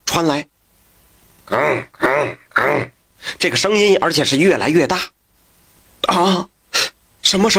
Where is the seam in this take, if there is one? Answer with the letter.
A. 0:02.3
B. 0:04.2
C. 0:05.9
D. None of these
D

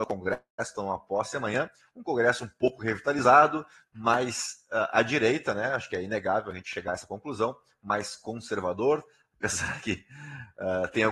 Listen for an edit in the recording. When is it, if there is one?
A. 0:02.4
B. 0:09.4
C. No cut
C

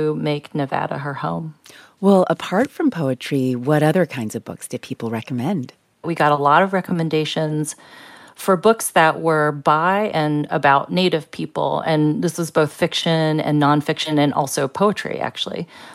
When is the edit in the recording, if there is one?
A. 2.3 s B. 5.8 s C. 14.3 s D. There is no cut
D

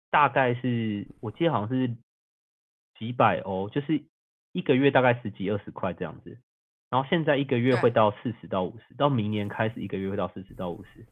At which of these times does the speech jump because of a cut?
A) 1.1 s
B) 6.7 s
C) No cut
A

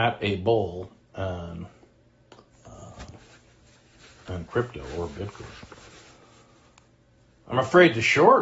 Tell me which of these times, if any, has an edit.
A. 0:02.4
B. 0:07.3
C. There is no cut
C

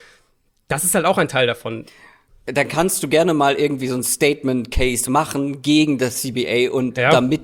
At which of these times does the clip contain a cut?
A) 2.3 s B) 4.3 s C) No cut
A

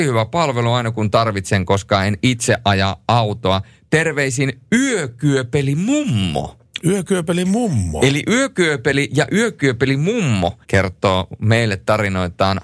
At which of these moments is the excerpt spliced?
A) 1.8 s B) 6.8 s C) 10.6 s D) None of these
C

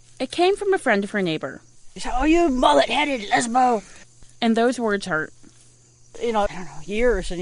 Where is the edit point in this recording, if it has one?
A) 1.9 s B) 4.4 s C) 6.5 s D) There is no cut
C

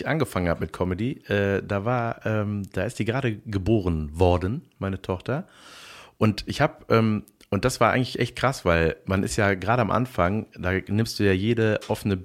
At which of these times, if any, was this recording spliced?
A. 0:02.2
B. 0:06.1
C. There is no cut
C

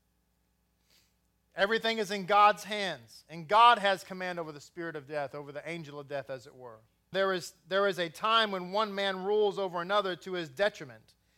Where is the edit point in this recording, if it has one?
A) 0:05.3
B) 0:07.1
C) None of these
B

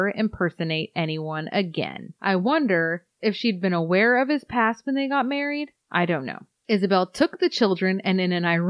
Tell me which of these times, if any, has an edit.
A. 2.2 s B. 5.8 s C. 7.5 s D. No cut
A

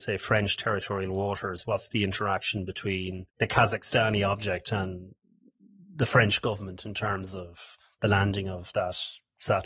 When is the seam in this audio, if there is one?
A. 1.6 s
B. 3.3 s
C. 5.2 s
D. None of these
B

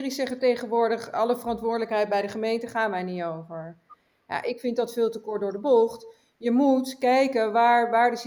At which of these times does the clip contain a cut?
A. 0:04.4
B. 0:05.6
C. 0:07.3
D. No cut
D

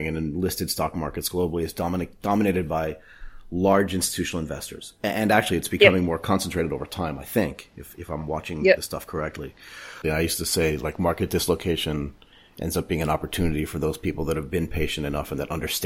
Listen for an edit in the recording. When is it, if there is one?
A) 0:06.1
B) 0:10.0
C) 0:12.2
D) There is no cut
B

